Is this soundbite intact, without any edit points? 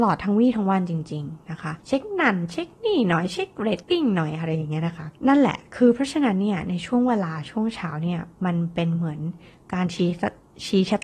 no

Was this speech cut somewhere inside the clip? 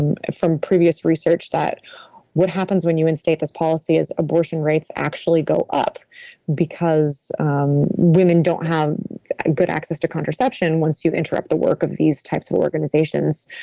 no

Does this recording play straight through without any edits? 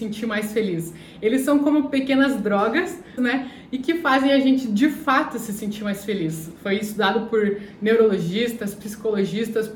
no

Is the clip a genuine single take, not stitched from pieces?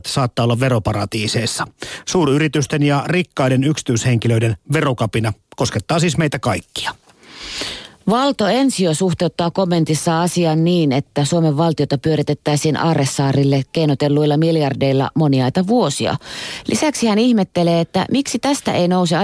yes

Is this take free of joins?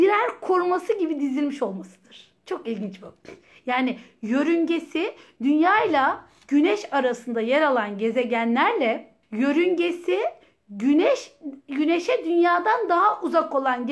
no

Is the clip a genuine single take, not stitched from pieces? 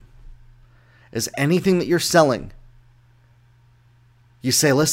yes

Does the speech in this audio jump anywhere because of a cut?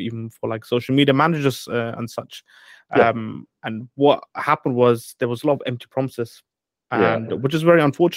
no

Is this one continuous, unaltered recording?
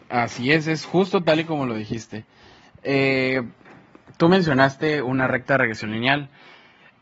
yes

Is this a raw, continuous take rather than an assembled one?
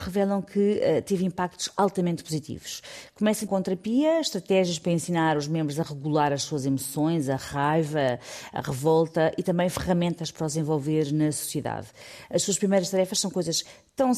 no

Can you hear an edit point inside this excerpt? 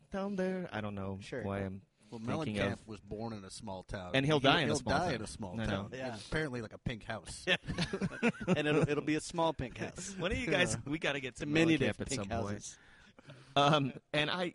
no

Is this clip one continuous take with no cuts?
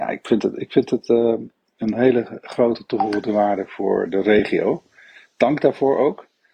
yes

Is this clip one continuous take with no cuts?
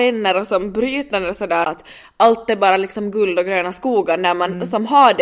no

